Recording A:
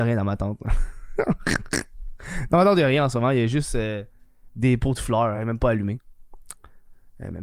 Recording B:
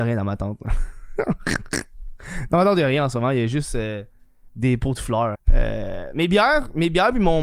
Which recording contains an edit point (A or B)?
B